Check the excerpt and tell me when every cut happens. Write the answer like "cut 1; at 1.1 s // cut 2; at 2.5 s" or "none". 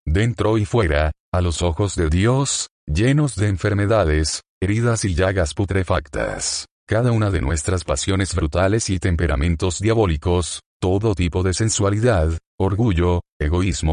none